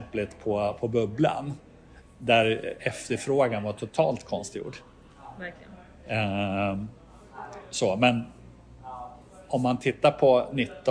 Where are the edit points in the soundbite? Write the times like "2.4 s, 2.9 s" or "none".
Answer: none